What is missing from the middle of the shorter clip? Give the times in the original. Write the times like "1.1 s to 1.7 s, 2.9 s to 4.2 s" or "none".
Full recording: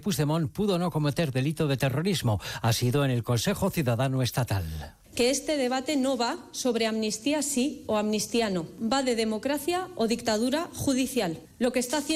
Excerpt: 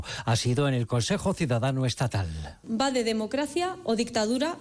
5.0 s to 8.8 s